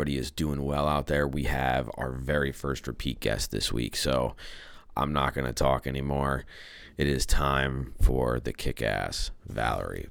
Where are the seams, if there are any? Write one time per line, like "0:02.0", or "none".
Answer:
none

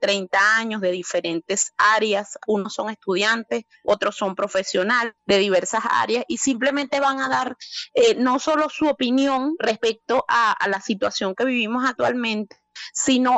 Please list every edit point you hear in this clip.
0:05.2

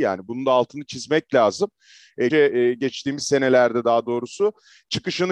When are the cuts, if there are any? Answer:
0:02.3

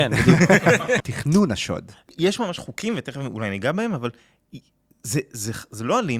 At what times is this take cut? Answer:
0:01.0

